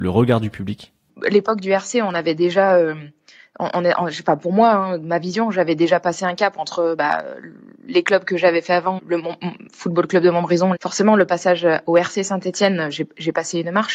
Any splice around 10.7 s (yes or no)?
yes